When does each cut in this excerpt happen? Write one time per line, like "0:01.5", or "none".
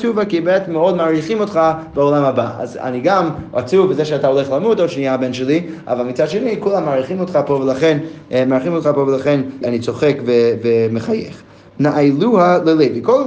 0:09.6
0:11.7